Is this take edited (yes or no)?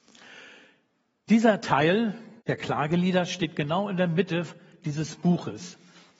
yes